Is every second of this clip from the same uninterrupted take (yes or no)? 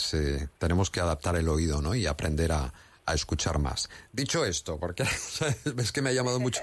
yes